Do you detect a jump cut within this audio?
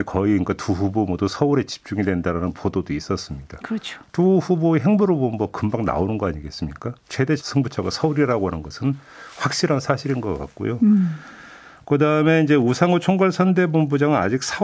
yes; 1 cut; at 7.4 s

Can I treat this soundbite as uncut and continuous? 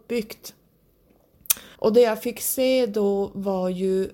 no; 1 cut; at 1.8 s

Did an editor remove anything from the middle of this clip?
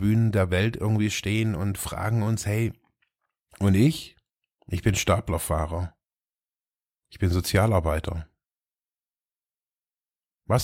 yes; 1 cut; at 4.6 s

